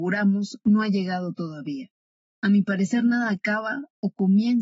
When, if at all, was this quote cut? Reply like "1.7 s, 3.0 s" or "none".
2.3 s